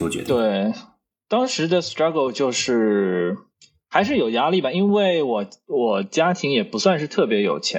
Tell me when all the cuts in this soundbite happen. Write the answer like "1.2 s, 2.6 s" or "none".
none